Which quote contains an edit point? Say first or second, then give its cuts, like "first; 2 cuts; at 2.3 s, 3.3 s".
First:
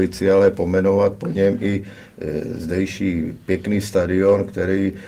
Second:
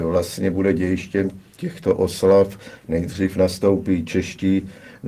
second; 1 cut; at 2.8 s